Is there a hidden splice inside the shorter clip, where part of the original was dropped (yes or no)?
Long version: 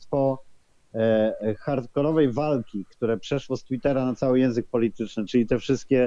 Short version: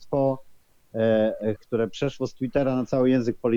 yes